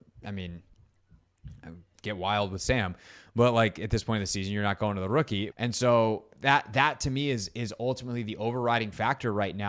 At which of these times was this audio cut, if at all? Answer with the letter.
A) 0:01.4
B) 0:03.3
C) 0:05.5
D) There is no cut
C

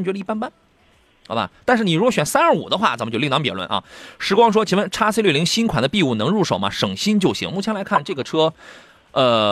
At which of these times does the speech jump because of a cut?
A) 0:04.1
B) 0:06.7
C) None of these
C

